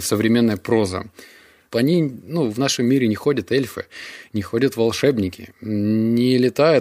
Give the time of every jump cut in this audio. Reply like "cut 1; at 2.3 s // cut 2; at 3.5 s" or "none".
cut 1; at 1.7 s